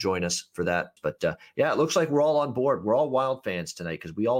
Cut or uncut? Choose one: cut